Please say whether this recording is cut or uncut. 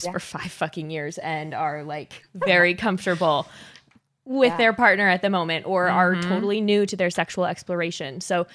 uncut